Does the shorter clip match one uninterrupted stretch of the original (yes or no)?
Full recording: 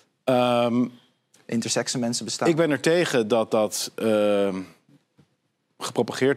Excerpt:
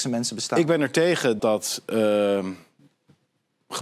no